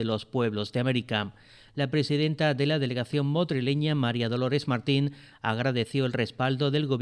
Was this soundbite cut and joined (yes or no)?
no